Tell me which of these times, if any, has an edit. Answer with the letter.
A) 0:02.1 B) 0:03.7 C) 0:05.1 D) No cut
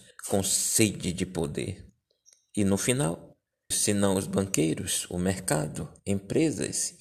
B